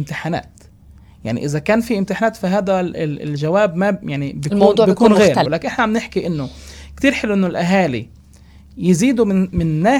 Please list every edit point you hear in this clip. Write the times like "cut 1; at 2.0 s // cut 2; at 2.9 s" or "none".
cut 1; at 5.4 s